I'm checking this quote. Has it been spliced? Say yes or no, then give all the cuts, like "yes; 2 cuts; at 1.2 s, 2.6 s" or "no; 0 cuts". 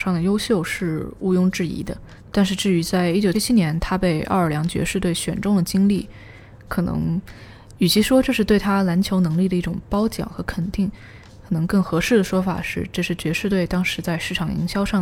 yes; 1 cut; at 3.3 s